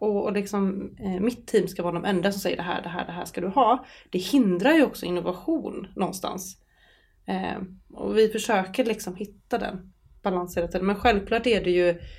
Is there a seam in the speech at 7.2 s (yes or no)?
no